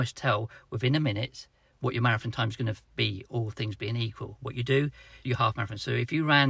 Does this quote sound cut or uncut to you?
cut